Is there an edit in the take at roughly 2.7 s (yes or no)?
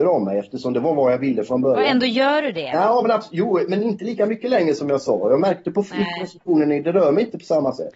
no